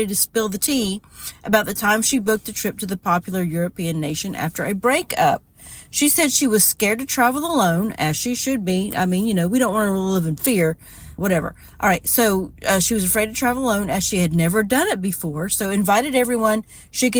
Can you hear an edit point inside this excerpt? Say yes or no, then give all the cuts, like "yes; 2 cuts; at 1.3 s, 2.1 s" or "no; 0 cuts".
yes; 1 cut; at 11.2 s